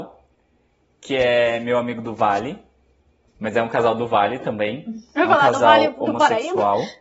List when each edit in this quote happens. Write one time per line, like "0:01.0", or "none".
0:03.3